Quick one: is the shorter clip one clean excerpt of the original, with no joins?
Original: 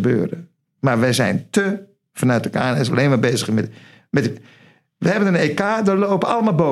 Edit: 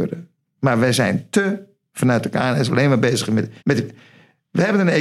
no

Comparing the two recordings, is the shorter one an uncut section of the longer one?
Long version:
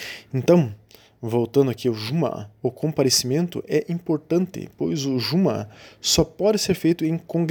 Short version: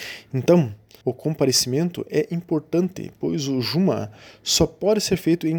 no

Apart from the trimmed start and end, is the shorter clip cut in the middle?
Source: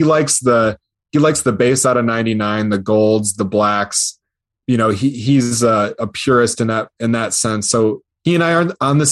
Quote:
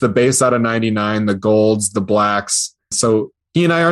yes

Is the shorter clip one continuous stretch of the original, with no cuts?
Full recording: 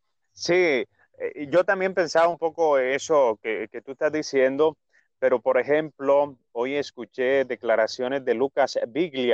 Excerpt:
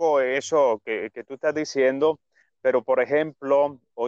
yes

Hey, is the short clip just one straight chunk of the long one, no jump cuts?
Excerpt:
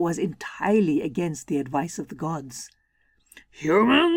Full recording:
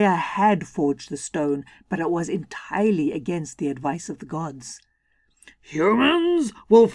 yes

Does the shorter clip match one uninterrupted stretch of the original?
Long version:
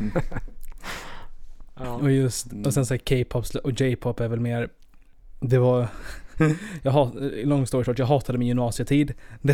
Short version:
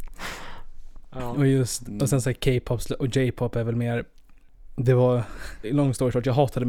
no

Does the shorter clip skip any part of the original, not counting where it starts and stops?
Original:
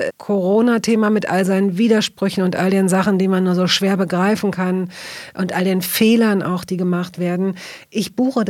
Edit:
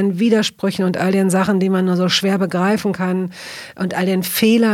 no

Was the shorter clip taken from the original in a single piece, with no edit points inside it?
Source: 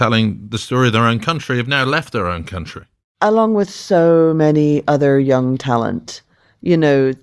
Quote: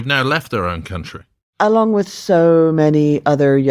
yes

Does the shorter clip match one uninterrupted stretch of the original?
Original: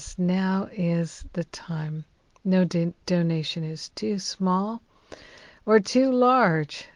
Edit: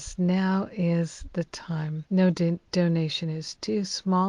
no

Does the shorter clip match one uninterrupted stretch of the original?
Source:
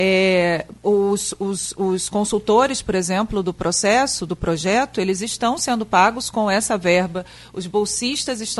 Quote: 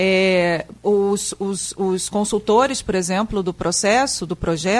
yes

